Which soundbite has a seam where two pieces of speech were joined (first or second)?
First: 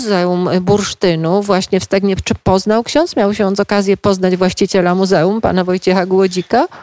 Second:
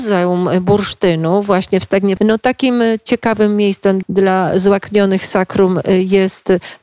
second